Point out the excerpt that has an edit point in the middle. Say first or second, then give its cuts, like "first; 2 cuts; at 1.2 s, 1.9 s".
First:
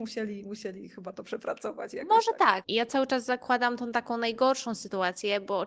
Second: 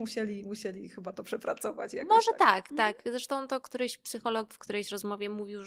first; 1 cut; at 2.6 s